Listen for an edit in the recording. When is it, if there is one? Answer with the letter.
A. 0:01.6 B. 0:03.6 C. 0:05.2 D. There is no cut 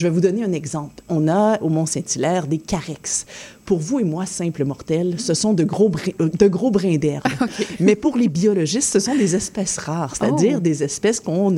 A